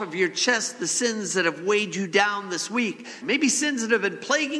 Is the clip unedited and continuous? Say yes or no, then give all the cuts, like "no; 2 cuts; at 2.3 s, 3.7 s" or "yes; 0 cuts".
no; 1 cut; at 3.2 s